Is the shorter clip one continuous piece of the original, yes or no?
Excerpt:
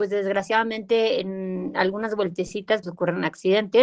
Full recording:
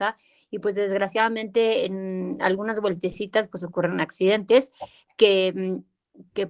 no